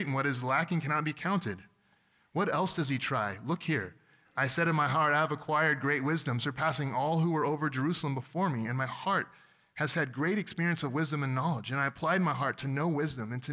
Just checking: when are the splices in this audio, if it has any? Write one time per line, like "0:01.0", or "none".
none